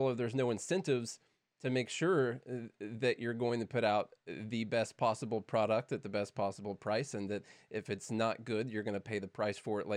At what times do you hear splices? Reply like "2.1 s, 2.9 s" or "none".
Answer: none